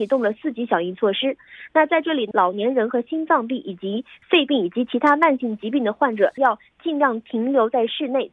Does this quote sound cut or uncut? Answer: cut